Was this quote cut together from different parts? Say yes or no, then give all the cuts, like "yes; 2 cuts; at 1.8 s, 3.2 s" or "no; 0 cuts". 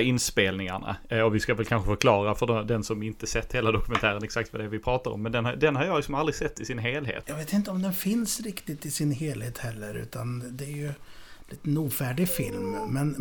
yes; 1 cut; at 7.2 s